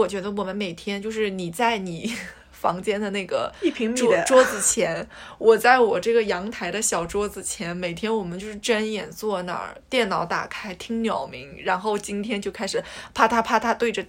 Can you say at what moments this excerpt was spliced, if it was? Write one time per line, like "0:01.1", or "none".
none